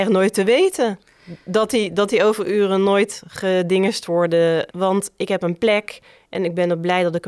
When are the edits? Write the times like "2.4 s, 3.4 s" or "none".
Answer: 4.7 s